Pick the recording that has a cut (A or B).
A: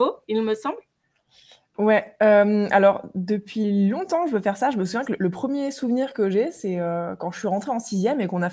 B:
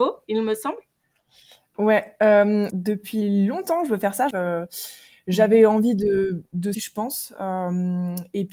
B